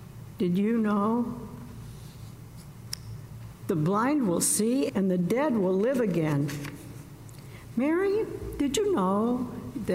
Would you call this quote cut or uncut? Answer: cut